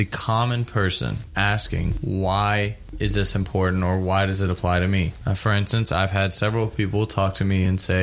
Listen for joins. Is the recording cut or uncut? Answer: uncut